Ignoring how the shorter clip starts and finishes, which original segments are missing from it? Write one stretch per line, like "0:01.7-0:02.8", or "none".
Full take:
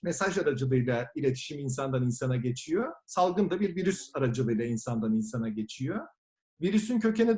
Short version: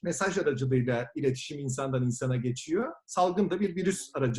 none